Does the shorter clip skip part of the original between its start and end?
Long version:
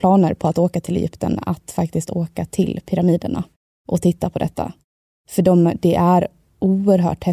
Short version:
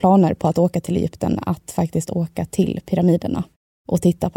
no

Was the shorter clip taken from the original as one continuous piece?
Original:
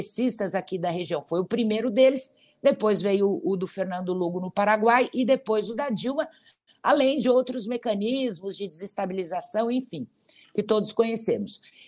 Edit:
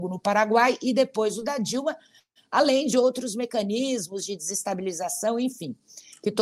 yes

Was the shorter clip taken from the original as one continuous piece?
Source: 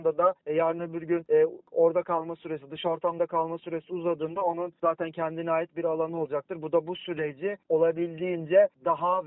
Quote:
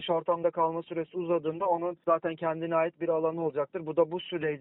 yes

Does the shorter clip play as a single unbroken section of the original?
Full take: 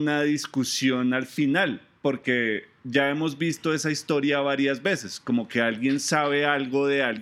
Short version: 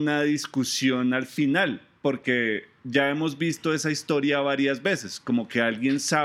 yes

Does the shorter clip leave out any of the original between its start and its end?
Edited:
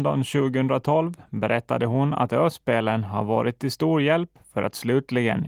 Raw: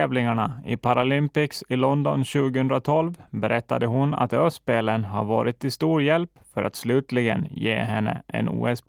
no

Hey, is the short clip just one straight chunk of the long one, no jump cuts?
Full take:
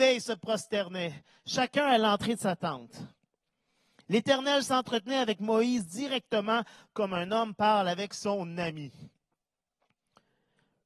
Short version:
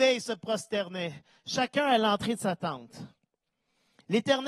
yes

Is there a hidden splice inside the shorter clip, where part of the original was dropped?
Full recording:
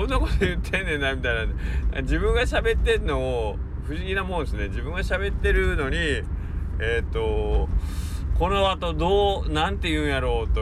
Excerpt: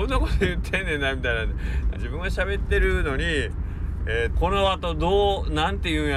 yes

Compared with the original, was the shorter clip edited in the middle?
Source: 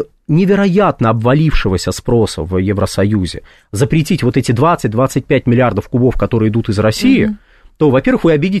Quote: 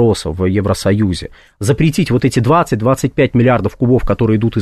no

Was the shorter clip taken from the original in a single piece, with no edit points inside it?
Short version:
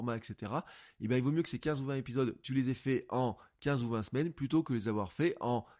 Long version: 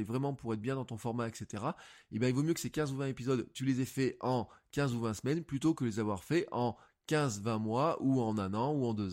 yes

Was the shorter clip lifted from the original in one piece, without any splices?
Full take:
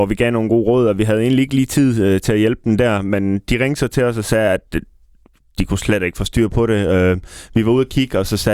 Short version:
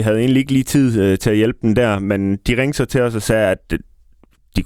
yes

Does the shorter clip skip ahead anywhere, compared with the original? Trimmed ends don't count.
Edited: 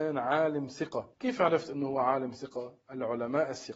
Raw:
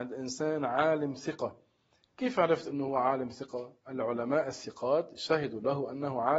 yes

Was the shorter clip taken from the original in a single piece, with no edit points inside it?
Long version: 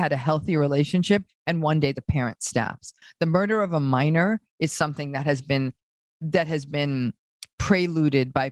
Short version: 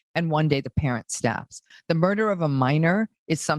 yes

